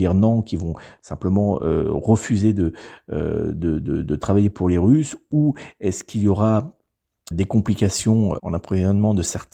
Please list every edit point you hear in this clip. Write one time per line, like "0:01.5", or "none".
0:07.3
0:08.4